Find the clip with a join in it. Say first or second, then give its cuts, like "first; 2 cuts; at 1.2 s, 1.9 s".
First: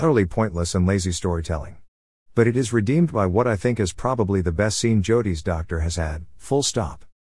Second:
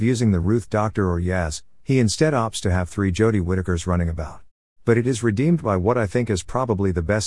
second; 1 cut; at 4.7 s